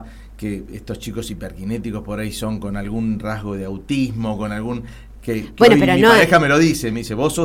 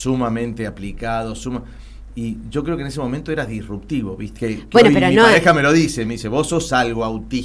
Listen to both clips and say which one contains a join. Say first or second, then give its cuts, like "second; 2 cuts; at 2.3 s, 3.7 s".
second; 2 cuts; at 1.4 s, 4.4 s